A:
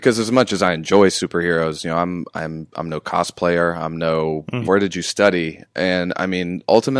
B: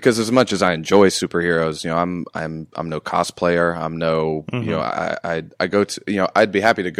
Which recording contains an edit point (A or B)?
A